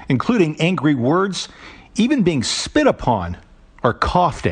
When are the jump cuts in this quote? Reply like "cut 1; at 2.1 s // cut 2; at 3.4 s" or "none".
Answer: none